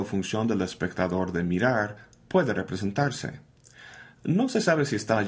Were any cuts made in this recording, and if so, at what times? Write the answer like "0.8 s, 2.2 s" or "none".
4.2 s